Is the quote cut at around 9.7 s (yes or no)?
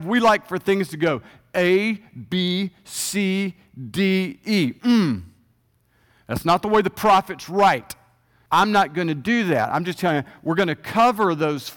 no